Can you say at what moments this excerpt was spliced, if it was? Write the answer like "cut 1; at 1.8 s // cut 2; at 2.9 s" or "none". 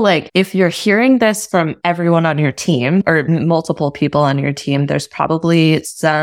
none